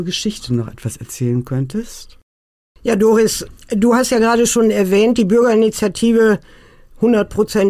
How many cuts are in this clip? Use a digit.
0